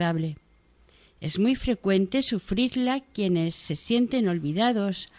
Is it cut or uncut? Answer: uncut